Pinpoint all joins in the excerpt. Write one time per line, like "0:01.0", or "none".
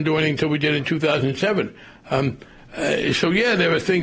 none